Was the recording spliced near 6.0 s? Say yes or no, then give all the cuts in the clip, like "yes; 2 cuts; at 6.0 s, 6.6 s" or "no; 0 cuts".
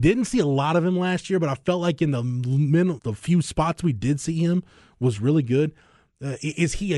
no; 1 cut; at 3.0 s